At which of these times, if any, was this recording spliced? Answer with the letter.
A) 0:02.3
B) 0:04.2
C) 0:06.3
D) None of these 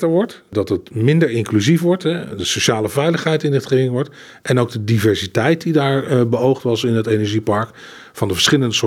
D